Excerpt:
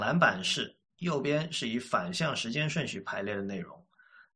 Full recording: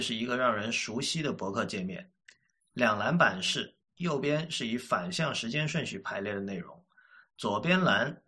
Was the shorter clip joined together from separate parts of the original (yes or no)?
no